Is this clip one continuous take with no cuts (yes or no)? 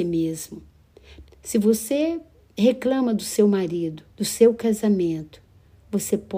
no